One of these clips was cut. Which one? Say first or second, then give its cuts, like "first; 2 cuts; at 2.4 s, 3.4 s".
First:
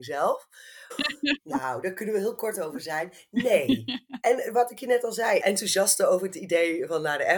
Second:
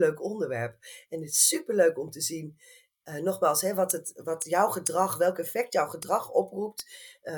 first; 3 cuts; at 0.9 s, 4.2 s, 5.4 s